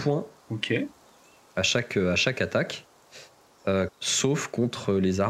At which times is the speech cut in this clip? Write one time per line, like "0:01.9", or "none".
0:03.9